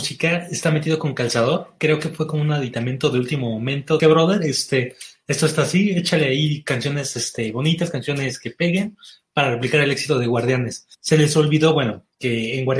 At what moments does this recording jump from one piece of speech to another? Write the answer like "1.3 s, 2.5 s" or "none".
4.0 s, 10.9 s